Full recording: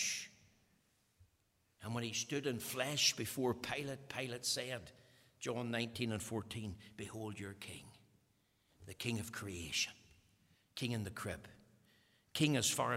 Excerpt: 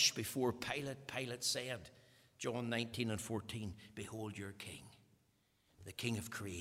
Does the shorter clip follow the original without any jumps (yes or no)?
yes